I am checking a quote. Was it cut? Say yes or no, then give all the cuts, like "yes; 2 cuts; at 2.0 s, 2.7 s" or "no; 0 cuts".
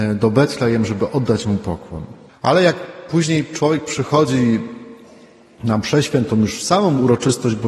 yes; 1 cut; at 2.3 s